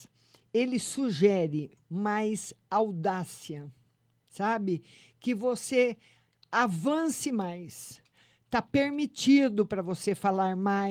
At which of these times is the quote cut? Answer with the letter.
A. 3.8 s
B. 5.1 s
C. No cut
C